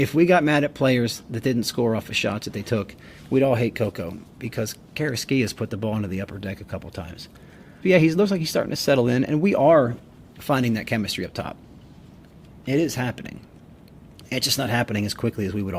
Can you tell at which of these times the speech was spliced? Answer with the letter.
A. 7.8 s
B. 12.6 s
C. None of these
A